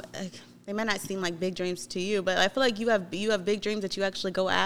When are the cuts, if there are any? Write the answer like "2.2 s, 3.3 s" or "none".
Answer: none